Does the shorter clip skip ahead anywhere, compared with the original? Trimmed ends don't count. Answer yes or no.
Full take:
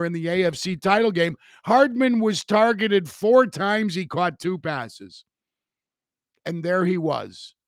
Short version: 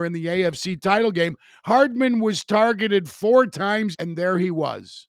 yes